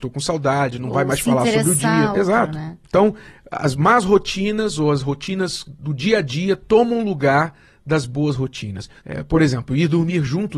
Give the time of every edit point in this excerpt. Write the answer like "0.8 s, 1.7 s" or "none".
2.1 s, 9.0 s